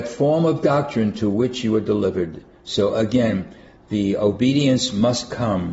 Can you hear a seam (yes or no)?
no